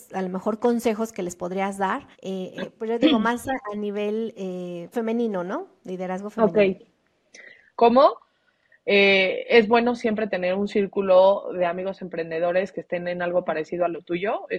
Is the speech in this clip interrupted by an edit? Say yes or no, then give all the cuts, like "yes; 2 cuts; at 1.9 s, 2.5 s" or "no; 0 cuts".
yes; 3 cuts; at 2.1 s, 4.9 s, 7.8 s